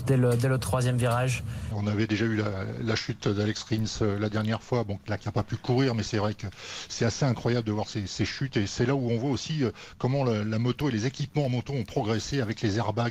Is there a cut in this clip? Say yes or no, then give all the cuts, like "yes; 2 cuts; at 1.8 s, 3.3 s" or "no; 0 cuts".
yes; 1 cut; at 1.7 s